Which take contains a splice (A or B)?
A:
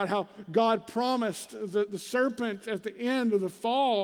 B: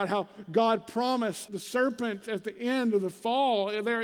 B